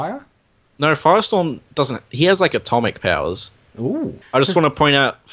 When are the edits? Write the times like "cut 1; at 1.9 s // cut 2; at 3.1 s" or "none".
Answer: cut 1; at 4.2 s

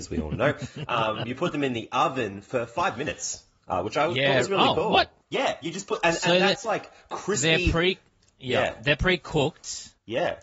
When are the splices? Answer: cut 1; at 5.2 s

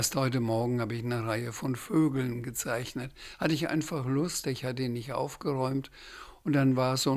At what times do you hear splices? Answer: cut 1; at 4.4 s

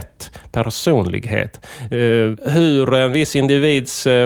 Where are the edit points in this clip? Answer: none

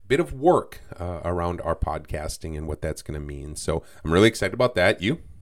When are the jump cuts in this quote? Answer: none

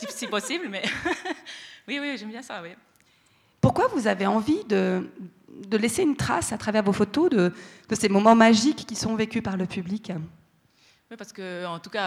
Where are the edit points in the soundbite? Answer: none

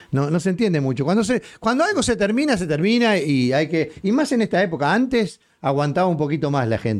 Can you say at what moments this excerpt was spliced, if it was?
none

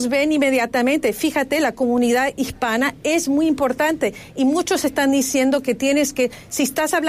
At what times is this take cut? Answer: none

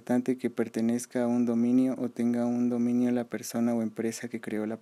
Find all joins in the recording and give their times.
none

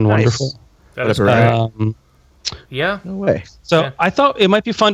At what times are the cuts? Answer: cut 1; at 2.7 s

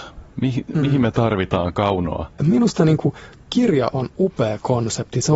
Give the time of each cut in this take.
cut 1; at 2.4 s

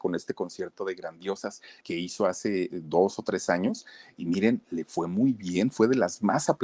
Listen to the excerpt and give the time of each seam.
cut 1; at 1.8 s

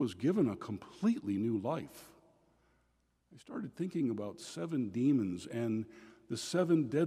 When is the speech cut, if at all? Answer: cut 1; at 3.2 s

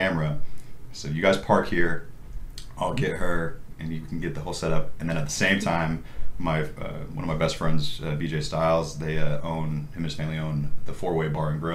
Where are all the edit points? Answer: none

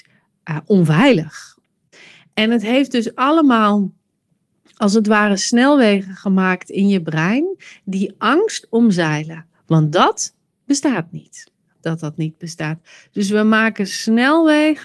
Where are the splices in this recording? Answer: cut 1; at 11.8 s

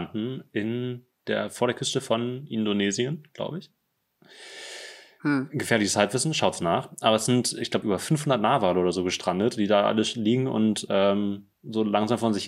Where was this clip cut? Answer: none

